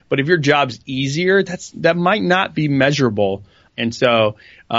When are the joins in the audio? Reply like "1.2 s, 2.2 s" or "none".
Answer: 3.7 s